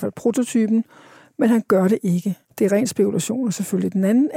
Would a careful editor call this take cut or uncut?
cut